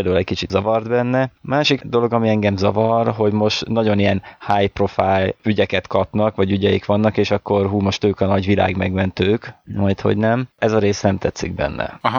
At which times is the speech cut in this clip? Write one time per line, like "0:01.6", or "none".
none